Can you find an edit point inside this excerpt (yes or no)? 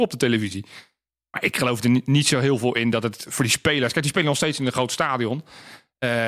no